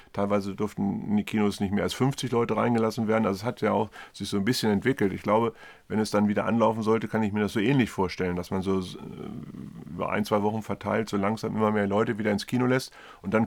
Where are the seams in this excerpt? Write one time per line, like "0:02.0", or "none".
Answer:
none